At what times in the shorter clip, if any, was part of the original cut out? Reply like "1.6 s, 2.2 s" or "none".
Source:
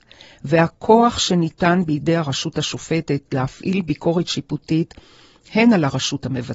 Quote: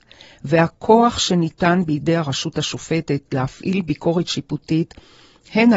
none